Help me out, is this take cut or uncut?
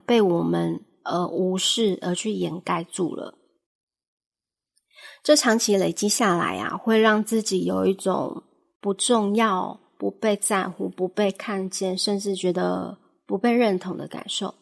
uncut